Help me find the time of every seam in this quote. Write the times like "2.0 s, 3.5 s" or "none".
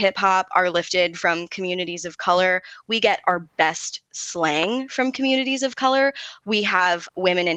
none